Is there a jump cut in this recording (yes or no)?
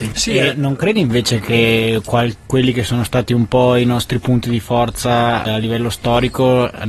yes